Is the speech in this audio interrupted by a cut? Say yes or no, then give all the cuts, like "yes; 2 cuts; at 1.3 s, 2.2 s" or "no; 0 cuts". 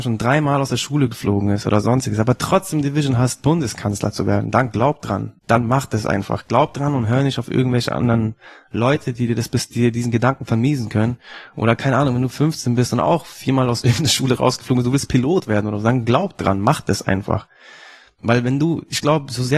yes; 1 cut; at 5.4 s